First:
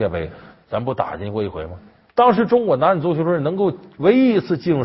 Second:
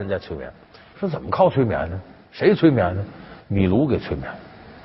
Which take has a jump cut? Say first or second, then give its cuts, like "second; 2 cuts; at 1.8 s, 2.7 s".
second; 1 cut; at 0.9 s